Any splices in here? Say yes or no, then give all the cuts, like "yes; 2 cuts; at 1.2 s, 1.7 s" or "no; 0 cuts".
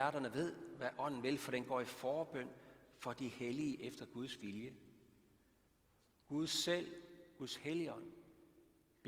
no; 0 cuts